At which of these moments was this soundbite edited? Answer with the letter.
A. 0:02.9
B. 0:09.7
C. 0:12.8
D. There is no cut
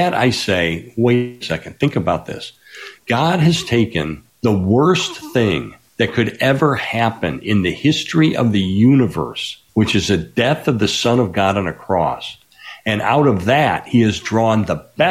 B